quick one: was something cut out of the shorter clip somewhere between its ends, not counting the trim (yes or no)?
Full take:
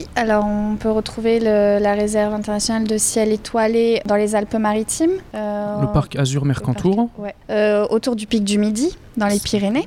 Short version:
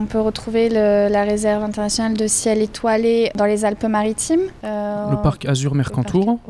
no